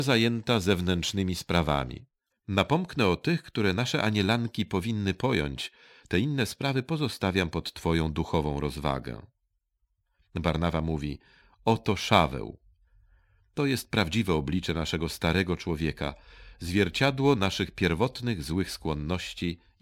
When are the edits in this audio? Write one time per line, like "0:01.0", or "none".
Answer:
0:02.3